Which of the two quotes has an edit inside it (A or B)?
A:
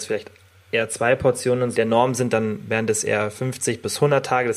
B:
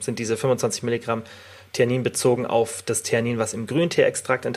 A